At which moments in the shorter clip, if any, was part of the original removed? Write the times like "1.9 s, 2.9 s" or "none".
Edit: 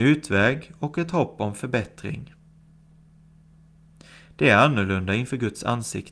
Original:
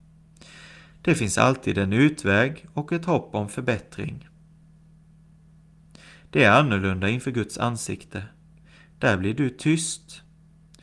none

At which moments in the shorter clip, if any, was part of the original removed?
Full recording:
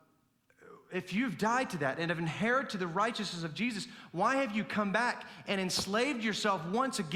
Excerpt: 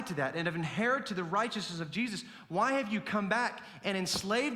none

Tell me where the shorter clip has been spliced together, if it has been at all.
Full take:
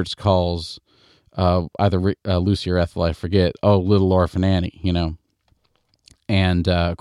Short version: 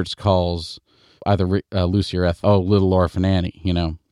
1.2 s, 2.4 s

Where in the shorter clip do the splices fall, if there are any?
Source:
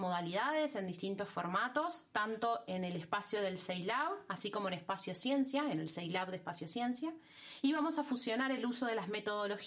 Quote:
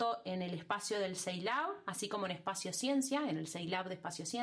none

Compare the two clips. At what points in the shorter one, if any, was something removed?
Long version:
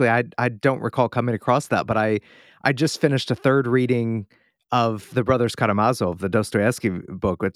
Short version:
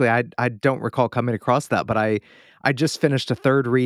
none

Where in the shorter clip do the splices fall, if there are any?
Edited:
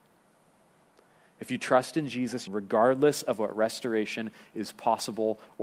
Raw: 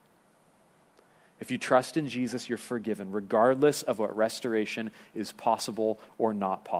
2.5 s

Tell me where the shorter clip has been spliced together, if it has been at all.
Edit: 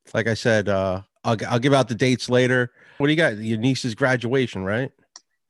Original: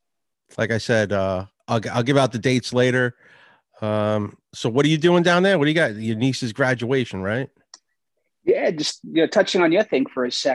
3.0 s

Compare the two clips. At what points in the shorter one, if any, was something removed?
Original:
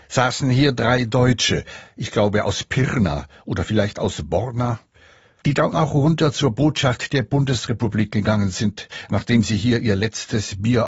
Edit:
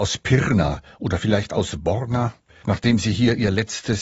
2.6 s

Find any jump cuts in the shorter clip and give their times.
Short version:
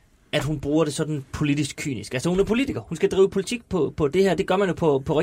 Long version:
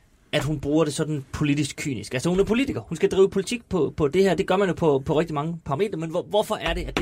none

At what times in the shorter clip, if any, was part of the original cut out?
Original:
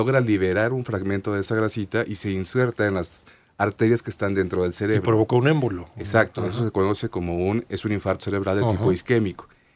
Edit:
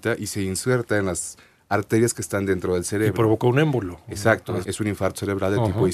4.6 s

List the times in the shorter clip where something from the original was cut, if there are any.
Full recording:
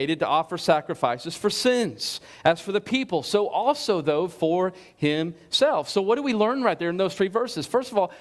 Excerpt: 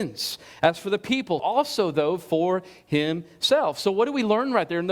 1.4 s

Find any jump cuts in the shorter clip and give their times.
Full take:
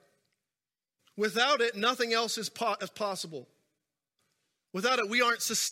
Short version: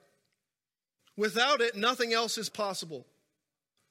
2.5 s

